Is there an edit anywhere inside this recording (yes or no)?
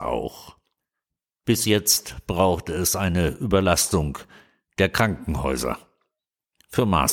no